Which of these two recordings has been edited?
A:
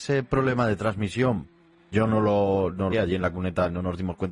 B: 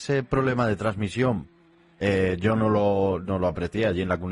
A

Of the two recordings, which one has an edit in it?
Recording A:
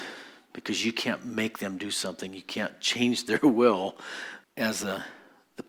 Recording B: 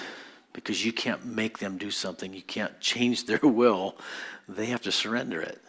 A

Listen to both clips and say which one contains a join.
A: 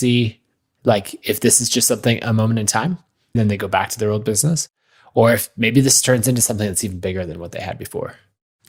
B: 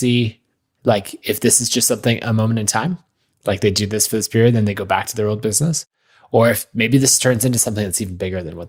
A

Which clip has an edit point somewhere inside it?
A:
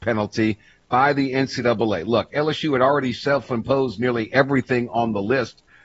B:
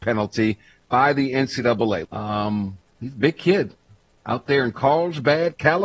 B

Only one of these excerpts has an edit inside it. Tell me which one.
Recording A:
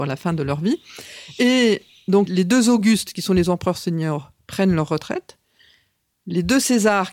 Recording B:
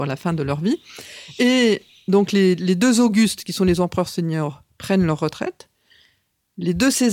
A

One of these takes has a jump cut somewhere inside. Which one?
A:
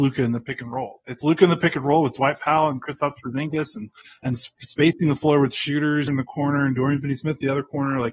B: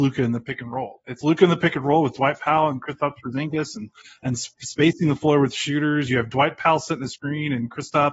A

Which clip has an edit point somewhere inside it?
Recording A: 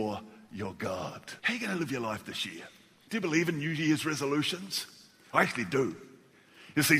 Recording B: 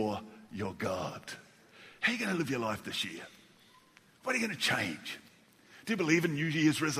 A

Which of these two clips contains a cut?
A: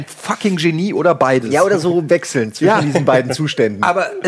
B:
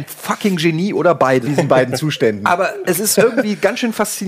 B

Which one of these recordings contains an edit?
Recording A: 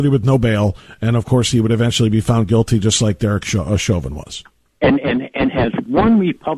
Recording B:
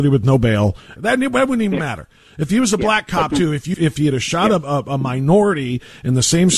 B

